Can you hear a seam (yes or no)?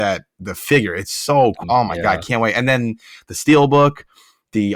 yes